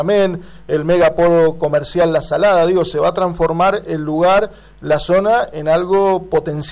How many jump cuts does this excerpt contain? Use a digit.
0